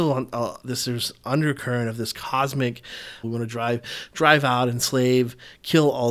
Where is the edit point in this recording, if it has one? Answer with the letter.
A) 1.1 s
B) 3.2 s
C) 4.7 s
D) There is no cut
B